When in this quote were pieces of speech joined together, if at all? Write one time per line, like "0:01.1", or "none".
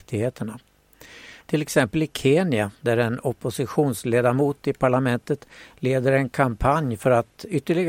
0:01.4